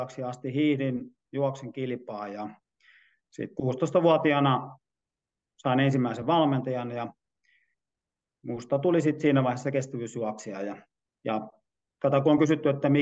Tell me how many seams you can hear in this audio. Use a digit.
0